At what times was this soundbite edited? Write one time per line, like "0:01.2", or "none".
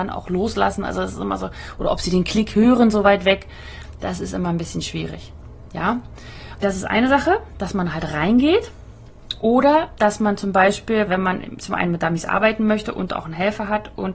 0:06.6
0:11.1